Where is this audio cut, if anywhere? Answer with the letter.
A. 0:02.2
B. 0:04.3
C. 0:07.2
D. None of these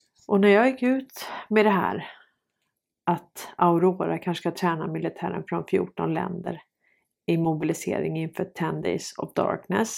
D